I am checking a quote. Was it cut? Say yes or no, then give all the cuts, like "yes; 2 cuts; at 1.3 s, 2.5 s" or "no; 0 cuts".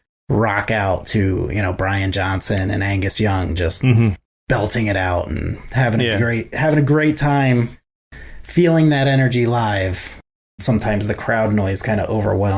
yes; 1 cut; at 10.6 s